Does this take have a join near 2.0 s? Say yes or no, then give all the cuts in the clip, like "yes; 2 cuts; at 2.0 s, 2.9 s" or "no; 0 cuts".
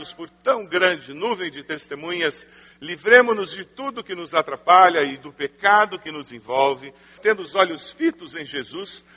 no; 1 cut; at 7.2 s